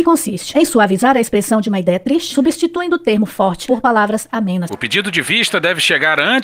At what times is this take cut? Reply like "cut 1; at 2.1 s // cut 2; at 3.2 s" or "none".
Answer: cut 1; at 4.7 s